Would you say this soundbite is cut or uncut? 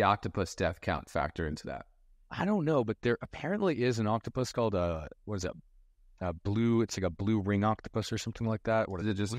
uncut